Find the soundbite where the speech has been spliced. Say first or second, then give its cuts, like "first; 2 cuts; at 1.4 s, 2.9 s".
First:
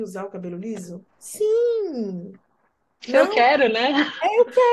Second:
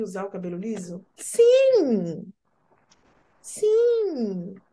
first; 1 cut; at 1.1 s